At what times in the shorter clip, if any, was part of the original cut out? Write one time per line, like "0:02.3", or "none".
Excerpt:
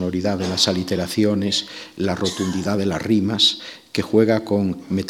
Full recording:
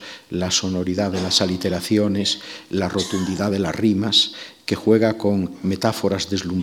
none